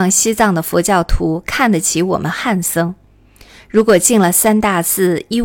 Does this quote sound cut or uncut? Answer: uncut